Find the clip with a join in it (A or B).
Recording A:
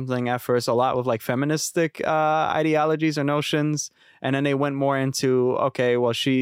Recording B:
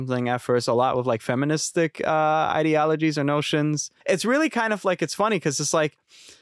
B